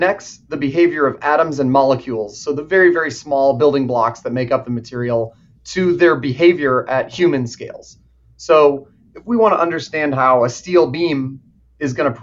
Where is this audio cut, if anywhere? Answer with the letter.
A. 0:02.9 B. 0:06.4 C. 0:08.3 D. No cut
D